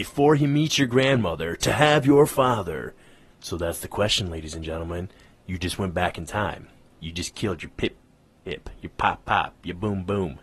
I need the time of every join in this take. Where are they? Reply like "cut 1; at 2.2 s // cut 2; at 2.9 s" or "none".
cut 1; at 3.3 s